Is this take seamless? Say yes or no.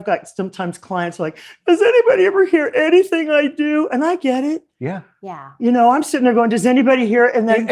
yes